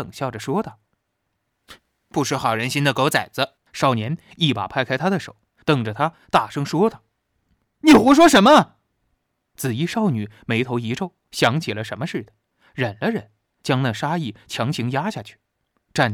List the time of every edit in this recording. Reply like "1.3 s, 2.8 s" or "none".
3.6 s, 11.3 s